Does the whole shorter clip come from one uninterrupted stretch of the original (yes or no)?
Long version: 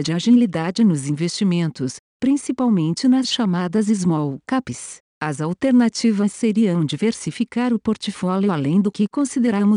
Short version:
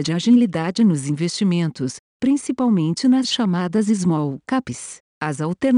yes